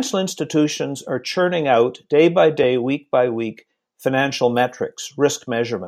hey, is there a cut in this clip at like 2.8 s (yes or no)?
no